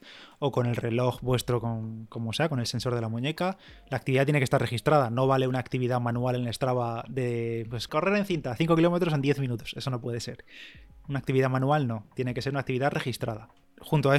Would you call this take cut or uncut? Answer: cut